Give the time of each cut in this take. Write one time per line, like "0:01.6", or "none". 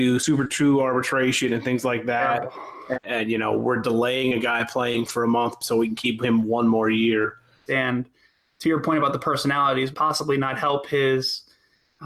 0:02.9
0:07.7
0:09.9

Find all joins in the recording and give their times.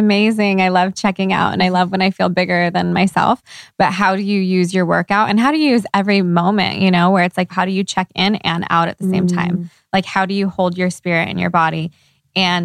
0:07.5

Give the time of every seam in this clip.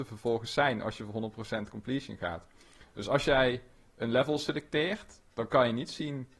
none

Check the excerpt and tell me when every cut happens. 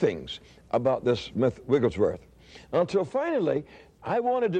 none

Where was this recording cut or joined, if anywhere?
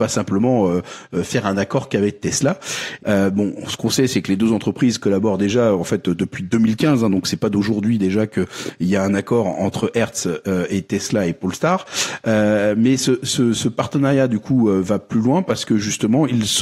0:03.0

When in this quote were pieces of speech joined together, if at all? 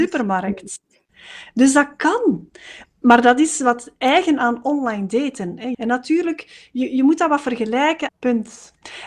0:02.8
0:05.7
0:08.1

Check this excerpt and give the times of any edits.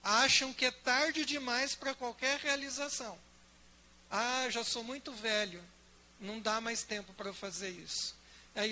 none

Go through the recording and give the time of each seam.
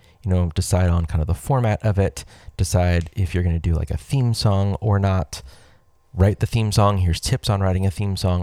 none

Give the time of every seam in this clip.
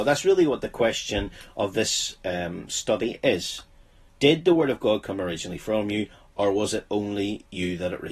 0:04.1

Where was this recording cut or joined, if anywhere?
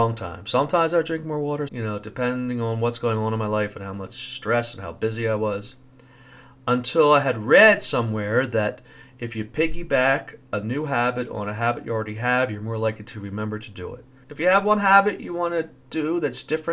0:01.7
0:14.2

